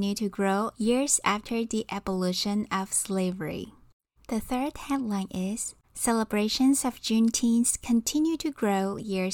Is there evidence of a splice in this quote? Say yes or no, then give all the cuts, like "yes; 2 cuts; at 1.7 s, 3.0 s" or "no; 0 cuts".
yes; 2 cuts; at 4.2 s, 5.8 s